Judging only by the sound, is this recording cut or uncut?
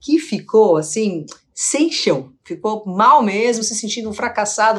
uncut